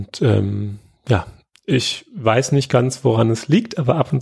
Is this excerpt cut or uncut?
uncut